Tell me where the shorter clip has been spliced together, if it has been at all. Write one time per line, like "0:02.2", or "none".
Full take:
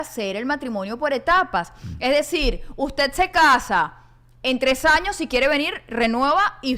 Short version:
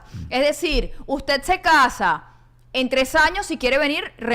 none

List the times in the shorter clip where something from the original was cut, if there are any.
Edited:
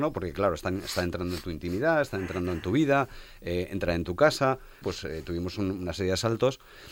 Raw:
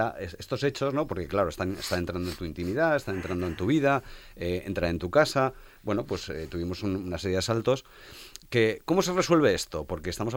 0:04.8

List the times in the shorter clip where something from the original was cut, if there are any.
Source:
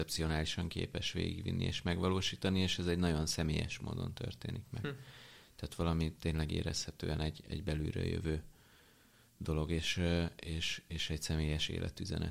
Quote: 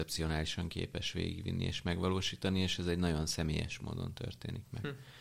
none

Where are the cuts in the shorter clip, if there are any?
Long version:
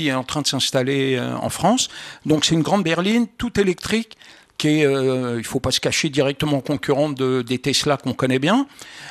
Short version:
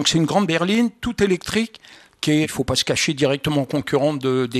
0:02.4

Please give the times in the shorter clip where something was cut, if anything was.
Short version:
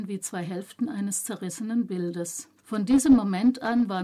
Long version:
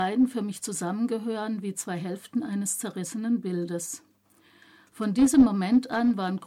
0:02.6

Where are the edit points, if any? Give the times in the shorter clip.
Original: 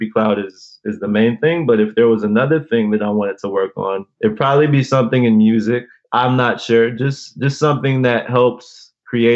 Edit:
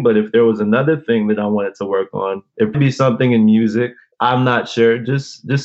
0:02.7

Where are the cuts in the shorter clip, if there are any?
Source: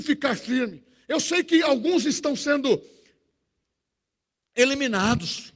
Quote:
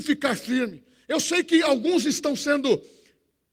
none

